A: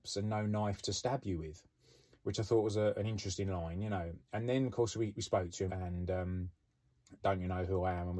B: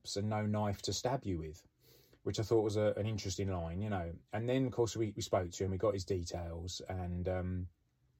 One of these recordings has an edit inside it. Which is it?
A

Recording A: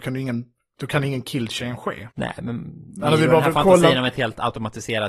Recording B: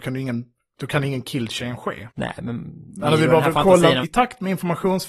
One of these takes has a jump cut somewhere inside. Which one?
B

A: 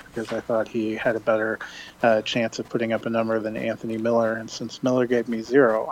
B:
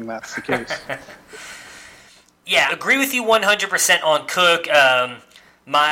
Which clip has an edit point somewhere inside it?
B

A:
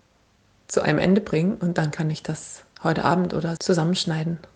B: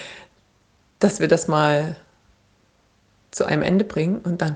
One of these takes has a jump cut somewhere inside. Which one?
A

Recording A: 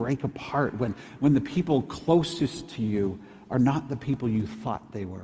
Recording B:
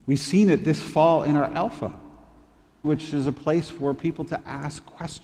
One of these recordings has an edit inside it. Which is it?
B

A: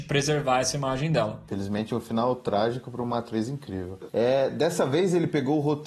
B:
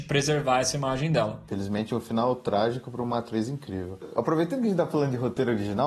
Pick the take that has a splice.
A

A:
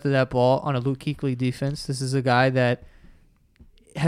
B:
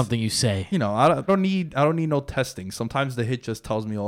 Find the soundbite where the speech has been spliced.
B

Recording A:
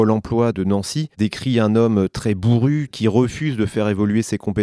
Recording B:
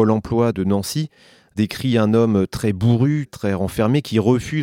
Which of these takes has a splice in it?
A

